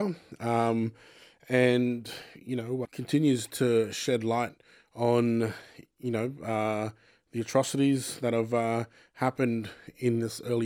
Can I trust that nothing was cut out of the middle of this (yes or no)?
no